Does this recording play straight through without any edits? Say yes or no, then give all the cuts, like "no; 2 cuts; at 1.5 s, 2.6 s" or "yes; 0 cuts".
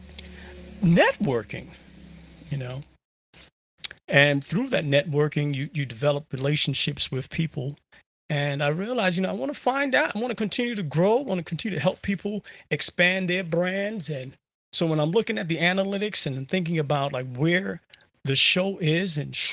yes; 0 cuts